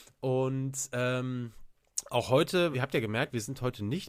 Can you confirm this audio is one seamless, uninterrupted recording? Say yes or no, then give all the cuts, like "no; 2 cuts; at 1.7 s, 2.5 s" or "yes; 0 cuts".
no; 1 cut; at 2.7 s